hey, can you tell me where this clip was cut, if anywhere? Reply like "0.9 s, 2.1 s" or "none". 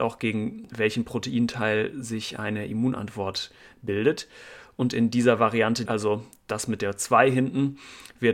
5.9 s

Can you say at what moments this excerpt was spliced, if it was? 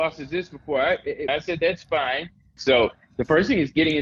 1.3 s, 2.6 s

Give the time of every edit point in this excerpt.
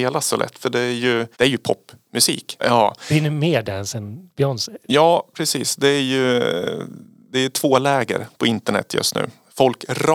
1.3 s, 2.6 s

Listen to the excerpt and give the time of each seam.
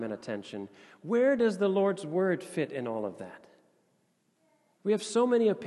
4.8 s

